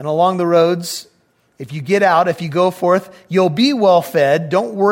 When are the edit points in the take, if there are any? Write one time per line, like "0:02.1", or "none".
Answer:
none